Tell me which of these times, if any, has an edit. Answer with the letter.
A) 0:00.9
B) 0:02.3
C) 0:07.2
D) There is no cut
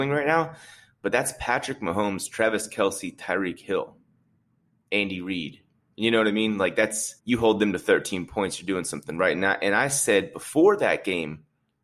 C